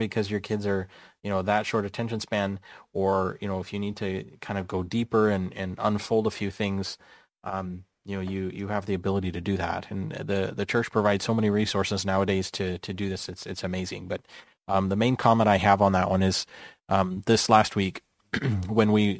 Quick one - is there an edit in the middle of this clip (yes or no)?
no